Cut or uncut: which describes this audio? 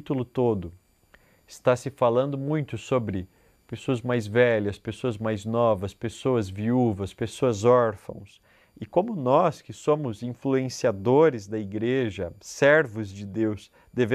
uncut